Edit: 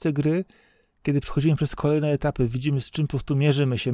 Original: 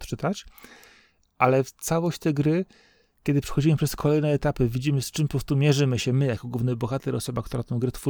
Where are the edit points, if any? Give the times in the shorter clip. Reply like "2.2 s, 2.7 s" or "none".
none